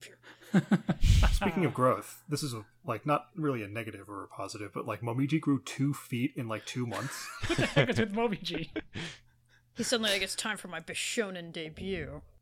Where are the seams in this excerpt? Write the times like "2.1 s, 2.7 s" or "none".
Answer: none